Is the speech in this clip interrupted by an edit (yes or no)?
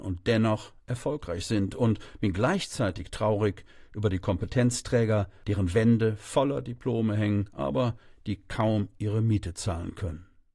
no